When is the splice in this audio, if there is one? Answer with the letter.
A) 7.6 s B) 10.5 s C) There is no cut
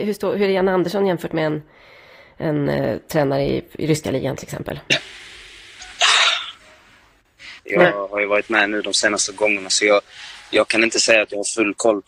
A